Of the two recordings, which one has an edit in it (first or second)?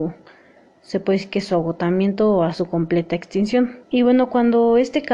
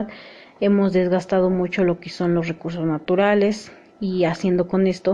first